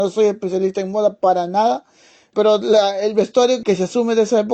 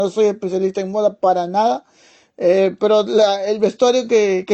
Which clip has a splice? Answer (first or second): first